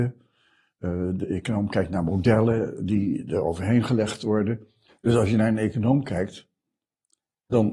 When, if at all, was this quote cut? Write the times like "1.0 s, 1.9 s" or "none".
4.9 s